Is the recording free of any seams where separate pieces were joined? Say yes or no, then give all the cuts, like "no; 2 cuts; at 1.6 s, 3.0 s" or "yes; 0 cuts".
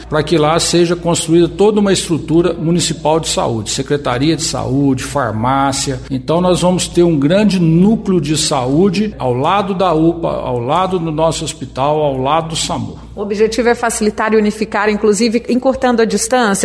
yes; 0 cuts